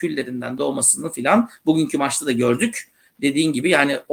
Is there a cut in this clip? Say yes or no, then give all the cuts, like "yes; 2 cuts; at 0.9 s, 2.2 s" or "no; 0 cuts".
no; 0 cuts